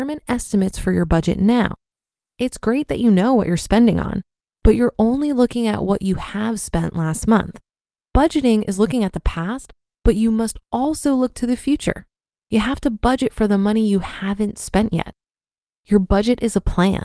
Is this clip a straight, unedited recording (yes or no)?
yes